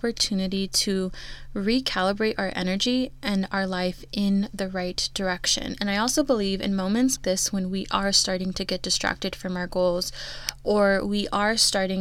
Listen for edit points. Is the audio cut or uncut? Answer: cut